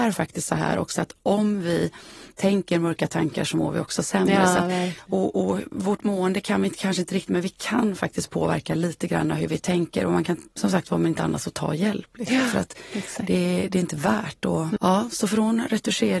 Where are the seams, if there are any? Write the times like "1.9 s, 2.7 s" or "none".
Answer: 14.8 s

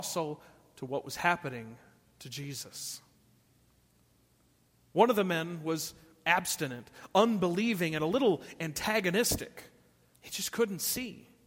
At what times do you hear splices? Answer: 10.1 s

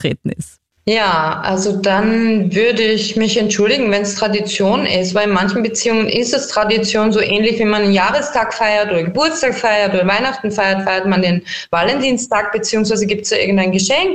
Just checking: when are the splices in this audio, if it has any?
none

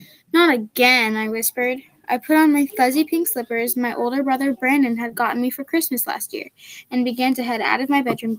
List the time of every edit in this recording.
none

